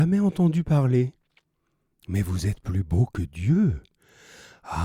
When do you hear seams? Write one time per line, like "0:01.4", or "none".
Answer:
none

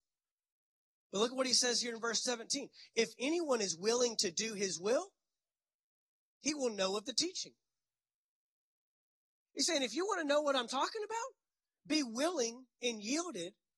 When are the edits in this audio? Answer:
none

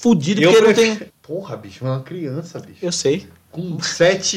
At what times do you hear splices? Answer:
0:01.1

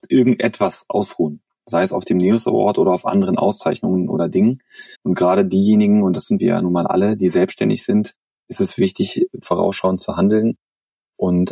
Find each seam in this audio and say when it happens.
0:04.9
0:09.4

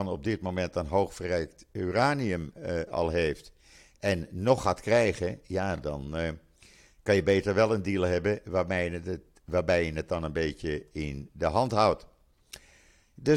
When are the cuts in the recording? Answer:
none

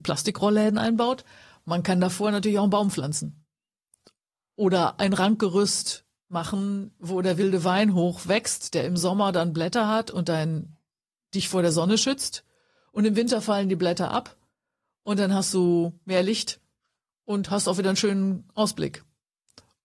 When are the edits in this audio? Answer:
none

